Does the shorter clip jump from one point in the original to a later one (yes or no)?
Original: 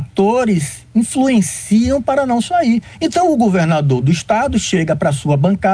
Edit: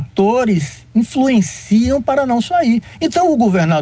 no